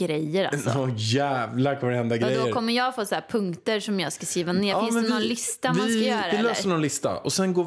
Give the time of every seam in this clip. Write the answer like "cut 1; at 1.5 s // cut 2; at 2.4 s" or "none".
none